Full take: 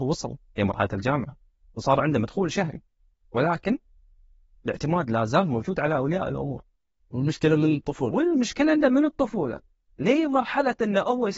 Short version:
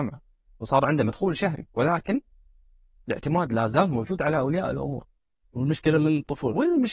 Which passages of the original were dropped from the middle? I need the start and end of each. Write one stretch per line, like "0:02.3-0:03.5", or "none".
0:02.8-0:03.3